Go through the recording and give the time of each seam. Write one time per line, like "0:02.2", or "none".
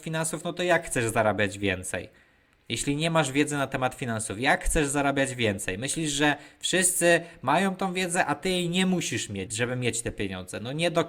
0:09.5